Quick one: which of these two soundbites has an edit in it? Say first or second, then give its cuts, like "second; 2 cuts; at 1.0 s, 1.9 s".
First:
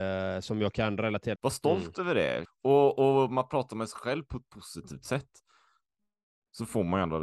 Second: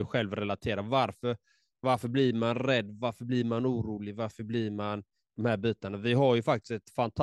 first; 2 cuts; at 1.3 s, 2.4 s